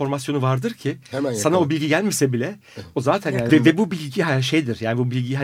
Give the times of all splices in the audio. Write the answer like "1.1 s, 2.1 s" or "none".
3.5 s